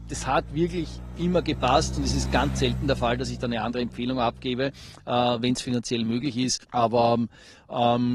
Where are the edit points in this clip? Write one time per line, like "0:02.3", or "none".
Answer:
0:06.6